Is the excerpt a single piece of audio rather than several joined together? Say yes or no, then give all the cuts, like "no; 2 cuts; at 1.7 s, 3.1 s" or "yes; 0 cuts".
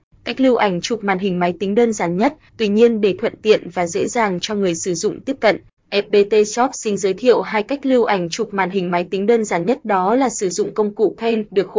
no; 1 cut; at 2.5 s